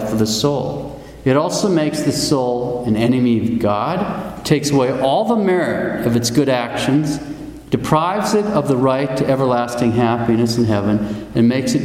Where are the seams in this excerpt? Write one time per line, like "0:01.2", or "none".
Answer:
none